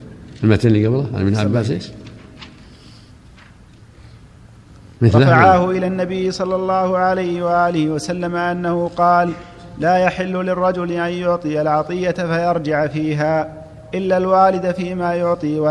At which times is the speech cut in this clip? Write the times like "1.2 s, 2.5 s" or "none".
4.9 s